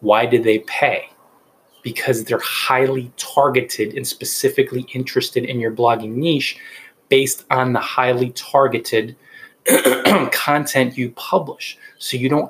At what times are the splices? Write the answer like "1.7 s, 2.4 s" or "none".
none